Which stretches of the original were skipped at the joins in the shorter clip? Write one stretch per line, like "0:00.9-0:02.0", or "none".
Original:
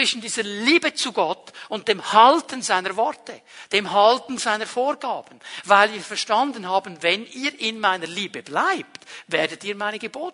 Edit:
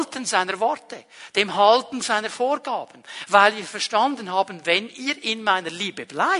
none